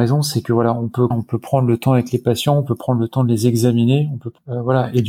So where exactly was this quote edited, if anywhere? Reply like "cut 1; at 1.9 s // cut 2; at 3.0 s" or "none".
cut 1; at 1.1 s